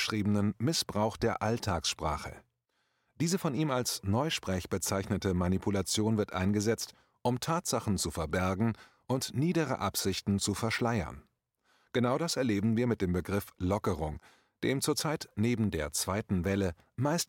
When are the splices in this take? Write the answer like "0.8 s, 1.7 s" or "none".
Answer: none